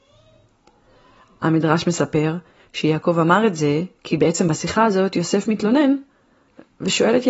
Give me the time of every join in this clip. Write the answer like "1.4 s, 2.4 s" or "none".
none